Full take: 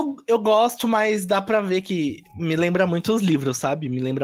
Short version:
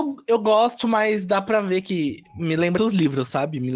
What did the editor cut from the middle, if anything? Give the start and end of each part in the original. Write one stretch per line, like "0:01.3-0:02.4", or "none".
0:02.8-0:03.1